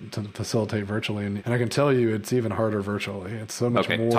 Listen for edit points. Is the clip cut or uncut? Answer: cut